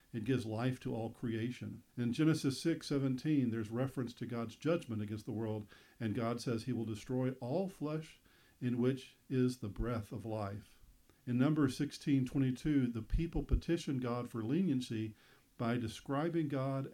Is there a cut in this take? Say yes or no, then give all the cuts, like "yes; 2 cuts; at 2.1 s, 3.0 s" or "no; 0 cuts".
yes; 2 cuts; at 1.9 s, 11.1 s